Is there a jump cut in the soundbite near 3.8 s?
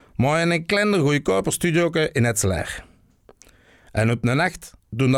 no; 0 cuts

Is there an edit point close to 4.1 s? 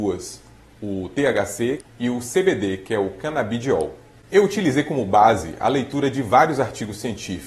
yes; 2 cuts; at 1.8 s, 4.1 s

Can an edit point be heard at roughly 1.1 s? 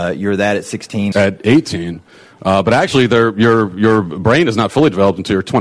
yes; 1 cut; at 1.1 s

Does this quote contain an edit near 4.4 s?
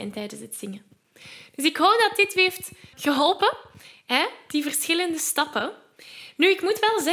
no; 1 cut; at 2.9 s

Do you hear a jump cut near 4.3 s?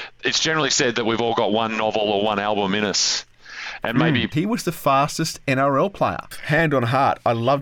yes; 2 cuts; at 4.3 s, 6.3 s

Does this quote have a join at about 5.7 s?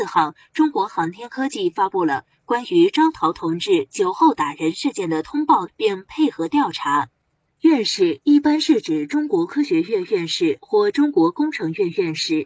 yes; 1 cut; at 5.7 s

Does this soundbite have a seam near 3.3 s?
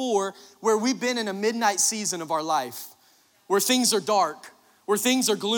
no; 0 cuts

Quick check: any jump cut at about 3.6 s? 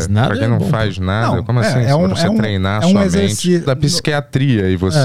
yes; 1 cut; at 3.6 s

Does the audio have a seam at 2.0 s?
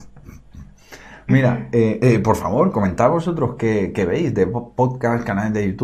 yes; 1 cut; at 2.0 s

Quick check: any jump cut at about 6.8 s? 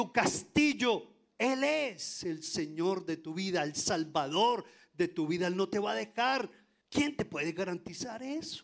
yes; 1 cut; at 6.8 s

